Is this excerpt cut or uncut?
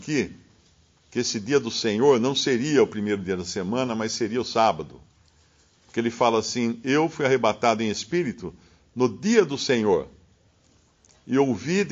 uncut